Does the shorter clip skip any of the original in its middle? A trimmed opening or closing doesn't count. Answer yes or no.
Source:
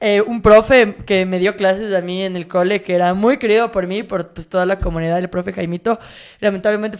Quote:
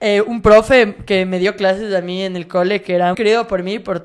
yes